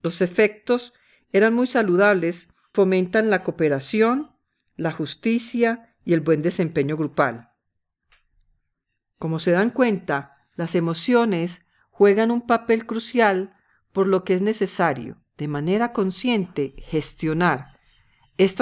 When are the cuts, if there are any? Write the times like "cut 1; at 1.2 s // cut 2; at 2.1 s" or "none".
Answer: cut 1; at 2.7 s